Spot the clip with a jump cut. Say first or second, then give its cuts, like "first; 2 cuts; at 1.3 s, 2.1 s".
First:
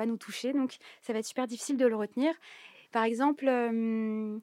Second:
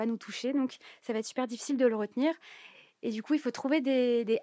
first; 1 cut; at 2.9 s